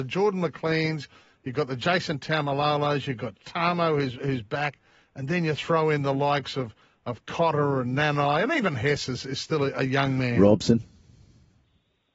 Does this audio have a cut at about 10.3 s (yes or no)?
no